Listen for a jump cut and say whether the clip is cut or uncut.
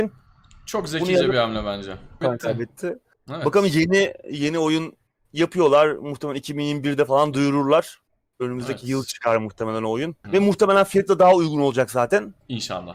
cut